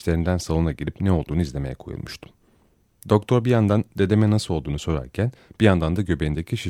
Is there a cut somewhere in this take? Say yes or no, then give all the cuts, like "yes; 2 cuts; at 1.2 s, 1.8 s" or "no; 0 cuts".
no; 0 cuts